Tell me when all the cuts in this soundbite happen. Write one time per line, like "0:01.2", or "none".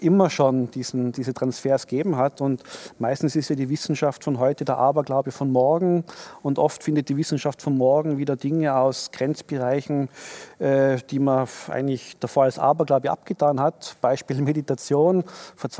none